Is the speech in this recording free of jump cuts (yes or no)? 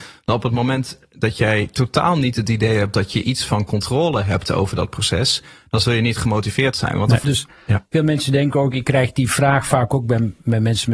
no